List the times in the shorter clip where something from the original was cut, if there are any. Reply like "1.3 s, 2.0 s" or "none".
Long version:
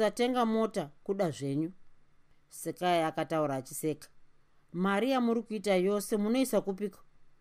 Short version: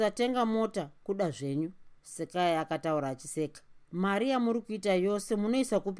2.0 s, 3.8 s